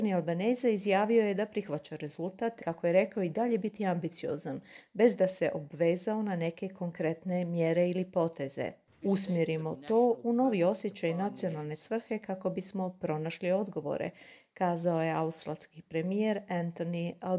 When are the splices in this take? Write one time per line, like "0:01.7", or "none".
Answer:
0:02.6
0:09.0